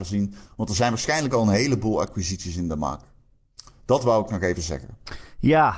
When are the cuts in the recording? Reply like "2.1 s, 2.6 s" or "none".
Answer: none